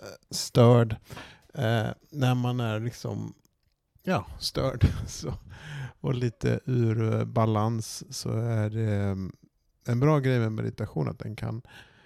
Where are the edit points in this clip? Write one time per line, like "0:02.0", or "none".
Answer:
none